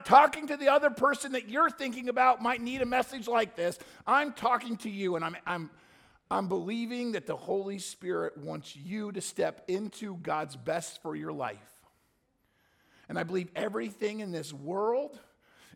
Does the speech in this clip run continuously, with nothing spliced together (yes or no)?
yes